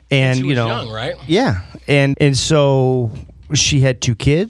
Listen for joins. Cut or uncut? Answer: cut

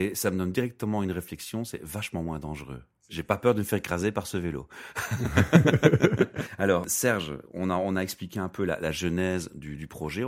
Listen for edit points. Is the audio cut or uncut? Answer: uncut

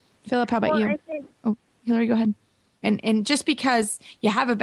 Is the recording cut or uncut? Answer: cut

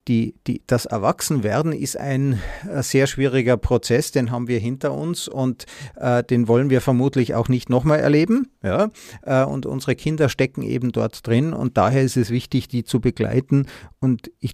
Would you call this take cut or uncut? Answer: uncut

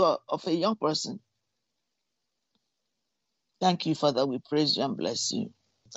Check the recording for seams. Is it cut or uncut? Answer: uncut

